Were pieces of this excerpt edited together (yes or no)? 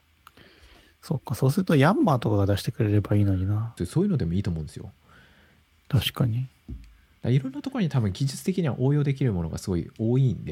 yes